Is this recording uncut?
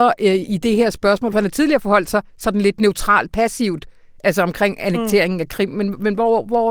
yes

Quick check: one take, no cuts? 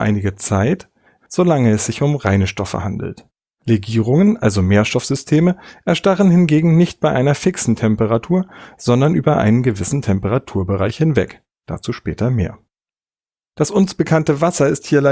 no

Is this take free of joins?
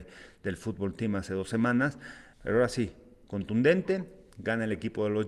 no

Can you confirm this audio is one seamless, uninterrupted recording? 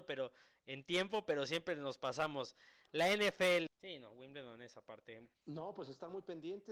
no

